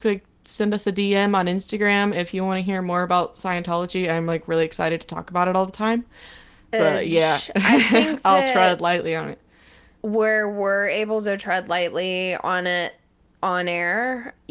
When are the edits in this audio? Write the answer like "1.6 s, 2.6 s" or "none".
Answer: 6.7 s